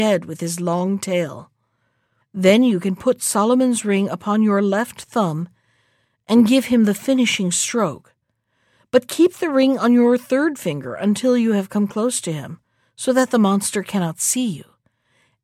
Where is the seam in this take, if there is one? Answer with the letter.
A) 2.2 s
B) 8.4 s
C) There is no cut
A